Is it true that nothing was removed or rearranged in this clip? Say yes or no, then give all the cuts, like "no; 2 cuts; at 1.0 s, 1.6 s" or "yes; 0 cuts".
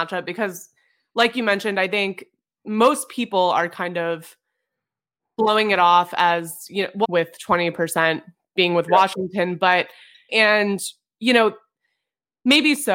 no; 2 cuts; at 7.0 s, 10.3 s